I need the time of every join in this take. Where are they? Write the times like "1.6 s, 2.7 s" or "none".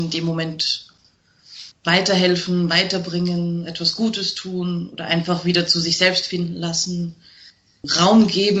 none